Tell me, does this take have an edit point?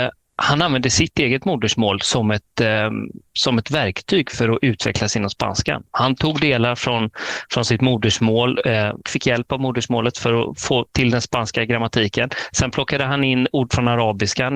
yes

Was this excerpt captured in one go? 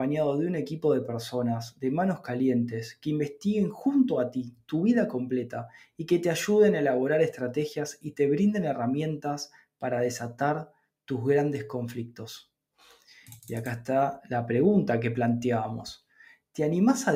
yes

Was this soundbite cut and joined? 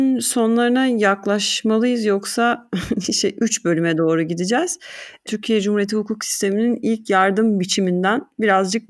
no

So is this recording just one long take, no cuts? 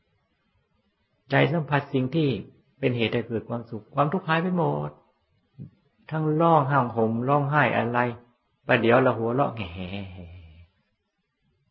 yes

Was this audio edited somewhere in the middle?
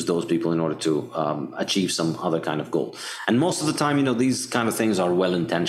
no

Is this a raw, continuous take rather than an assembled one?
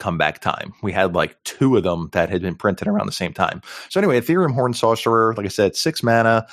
yes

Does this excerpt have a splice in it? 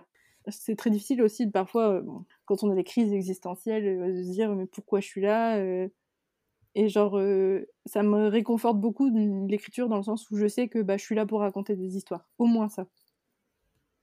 no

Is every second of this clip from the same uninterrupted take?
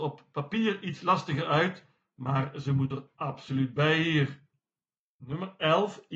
yes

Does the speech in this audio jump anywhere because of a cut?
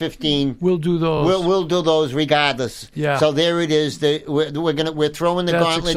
no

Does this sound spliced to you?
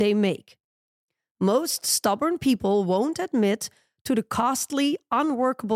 no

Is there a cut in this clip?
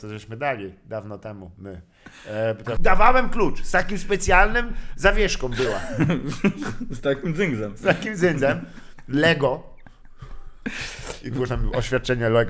yes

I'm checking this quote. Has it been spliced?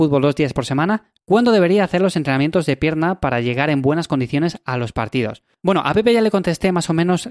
yes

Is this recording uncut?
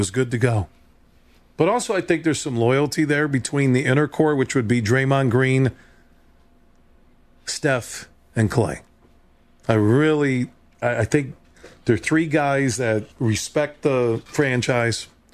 no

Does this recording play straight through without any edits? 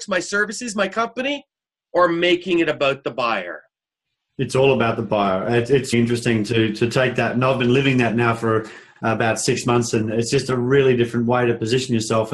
no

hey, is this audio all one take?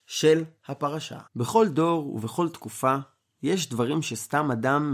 no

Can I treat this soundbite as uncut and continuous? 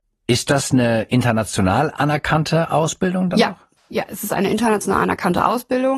yes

